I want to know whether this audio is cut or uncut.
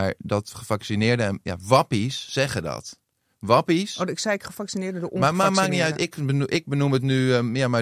uncut